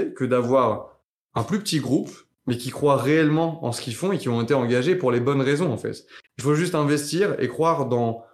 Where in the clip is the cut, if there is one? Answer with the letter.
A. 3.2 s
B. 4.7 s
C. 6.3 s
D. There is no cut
C